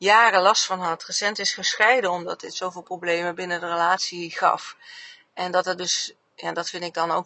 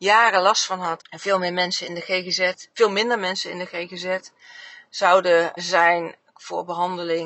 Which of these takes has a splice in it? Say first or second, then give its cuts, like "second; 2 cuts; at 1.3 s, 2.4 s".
second; 2 cuts; at 1.0 s, 5.6 s